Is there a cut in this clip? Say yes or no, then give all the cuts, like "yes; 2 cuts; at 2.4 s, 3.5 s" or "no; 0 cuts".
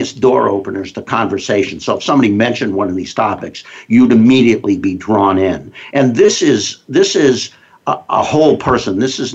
no; 0 cuts